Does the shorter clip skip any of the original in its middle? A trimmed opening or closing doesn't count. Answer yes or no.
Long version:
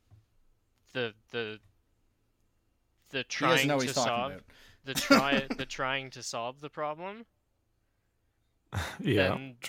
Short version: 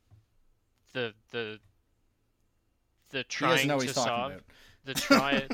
no